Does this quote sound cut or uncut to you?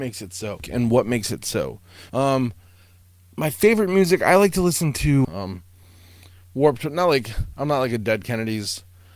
cut